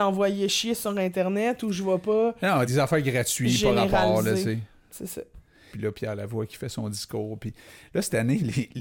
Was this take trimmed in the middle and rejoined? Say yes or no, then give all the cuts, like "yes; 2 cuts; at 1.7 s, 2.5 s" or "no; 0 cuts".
yes; 2 cuts; at 2.7 s, 5.7 s